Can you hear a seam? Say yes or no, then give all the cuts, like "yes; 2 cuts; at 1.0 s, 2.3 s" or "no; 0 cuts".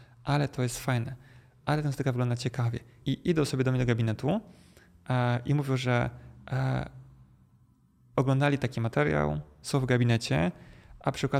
yes; 2 cuts; at 3.0 s, 9.6 s